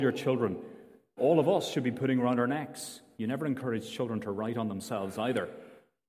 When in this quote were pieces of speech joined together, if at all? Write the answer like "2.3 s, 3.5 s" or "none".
1.2 s, 3.2 s

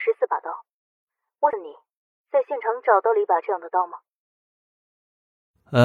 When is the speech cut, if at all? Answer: 1.5 s

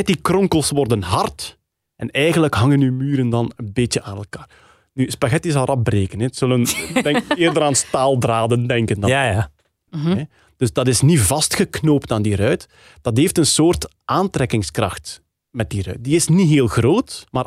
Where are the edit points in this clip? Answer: 9.9 s

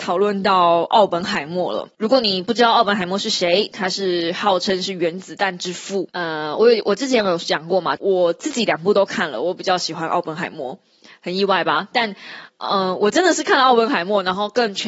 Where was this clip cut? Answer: 6.1 s, 8.0 s

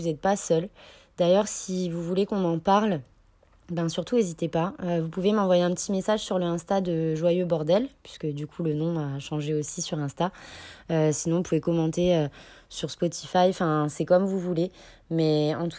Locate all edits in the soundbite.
none

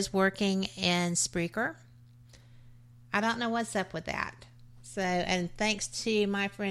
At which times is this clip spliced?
none

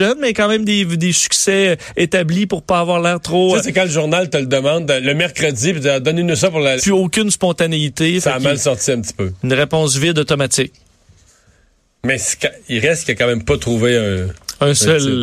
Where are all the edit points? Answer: 6.8 s

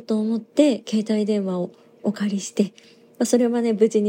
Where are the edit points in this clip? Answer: none

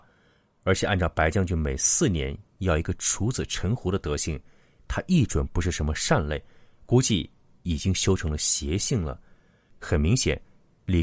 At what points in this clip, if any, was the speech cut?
9.7 s

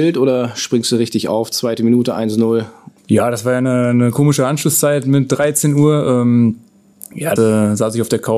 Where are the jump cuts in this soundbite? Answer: 3.0 s, 7.4 s

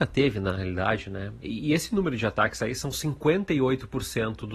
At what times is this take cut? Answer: 1.4 s

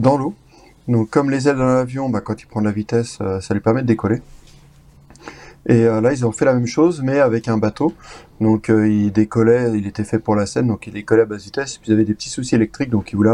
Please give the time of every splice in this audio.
none

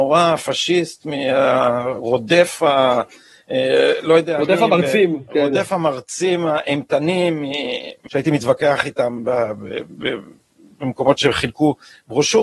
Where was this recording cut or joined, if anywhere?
8.1 s

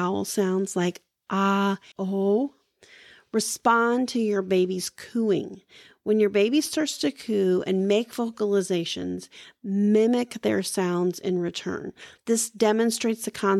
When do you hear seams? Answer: 1.9 s, 12.2 s

